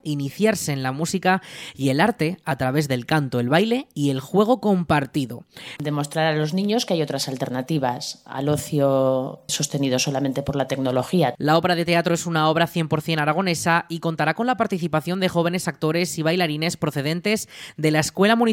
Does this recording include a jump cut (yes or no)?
yes